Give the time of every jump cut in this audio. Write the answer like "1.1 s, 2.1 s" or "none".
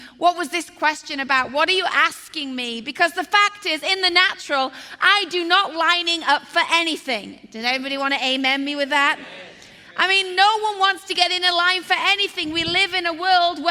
none